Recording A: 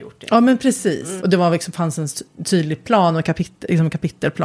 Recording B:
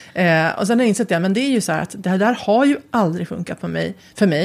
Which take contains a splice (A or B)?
A